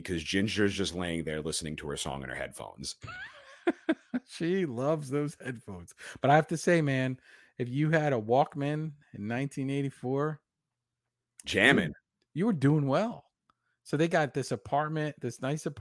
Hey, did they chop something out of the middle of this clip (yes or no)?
no